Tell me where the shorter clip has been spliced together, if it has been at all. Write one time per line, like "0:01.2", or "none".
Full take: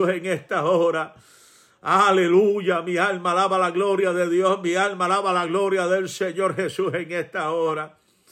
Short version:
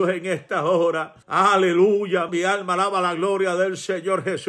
0:01.2
0:02.3

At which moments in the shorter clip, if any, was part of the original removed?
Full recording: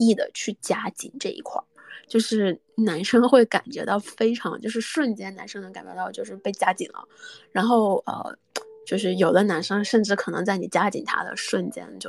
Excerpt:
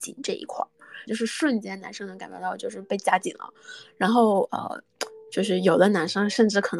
0:01.1

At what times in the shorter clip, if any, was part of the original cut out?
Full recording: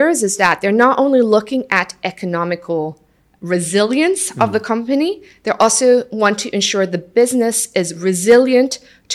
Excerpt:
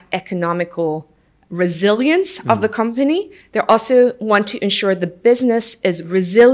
none

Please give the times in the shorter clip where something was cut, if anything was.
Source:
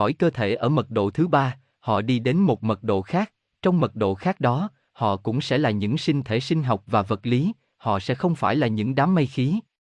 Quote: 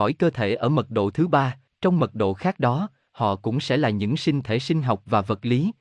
0:01.7

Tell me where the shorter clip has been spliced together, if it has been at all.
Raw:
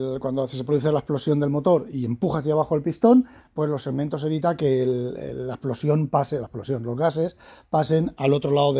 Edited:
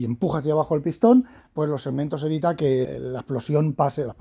0:02.8

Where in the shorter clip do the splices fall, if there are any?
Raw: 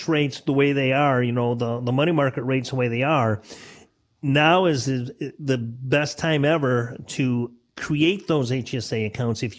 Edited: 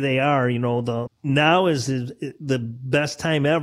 0:01.1

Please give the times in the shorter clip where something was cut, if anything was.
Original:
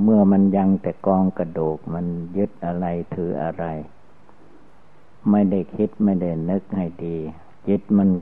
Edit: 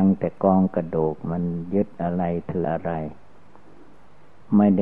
0:02.6

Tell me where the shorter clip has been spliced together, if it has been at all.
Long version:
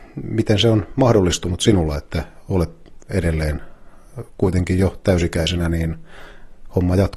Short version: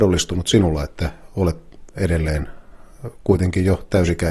none

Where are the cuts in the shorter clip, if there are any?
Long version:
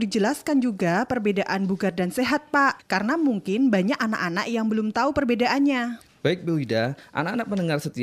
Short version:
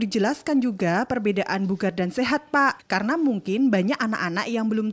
none

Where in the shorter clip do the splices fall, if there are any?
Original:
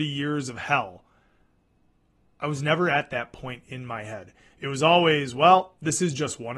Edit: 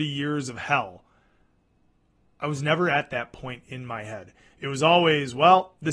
none

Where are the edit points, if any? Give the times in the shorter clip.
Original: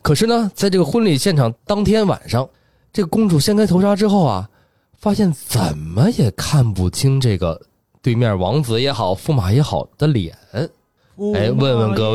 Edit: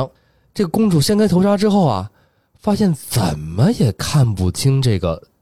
none

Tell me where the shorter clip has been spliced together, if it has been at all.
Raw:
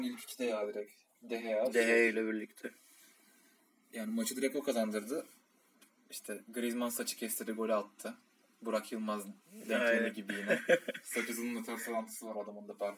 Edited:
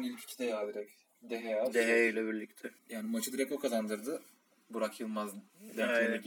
0:02.8
0:04.5

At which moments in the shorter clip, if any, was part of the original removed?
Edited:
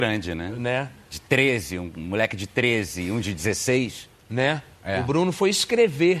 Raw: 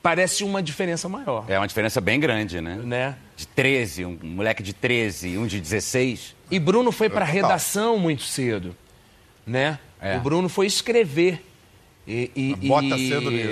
0:04.1

